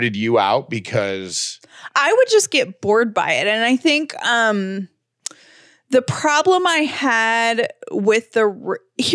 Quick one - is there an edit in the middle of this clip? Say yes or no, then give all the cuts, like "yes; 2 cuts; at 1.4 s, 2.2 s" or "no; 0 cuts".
no; 0 cuts